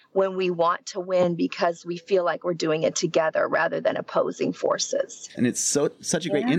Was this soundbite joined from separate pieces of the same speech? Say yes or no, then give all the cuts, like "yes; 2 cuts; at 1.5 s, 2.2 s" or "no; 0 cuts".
yes; 1 cut; at 5.3 s